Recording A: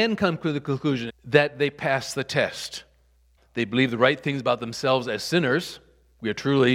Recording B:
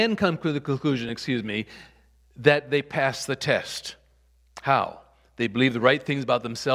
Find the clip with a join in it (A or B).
A